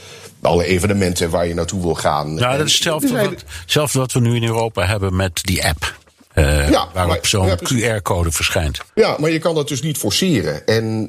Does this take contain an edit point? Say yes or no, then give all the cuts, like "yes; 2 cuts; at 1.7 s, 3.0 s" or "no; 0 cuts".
yes; 1 cut; at 8.9 s